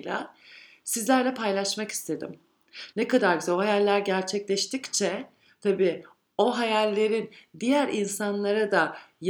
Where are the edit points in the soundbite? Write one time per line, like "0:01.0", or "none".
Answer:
0:02.9